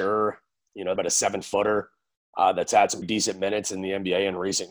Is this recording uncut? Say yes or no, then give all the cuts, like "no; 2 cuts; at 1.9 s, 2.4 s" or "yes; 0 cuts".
no; 2 cuts; at 1.0 s, 3.0 s